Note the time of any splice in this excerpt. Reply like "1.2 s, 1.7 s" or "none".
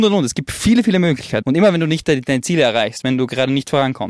1.4 s, 3.0 s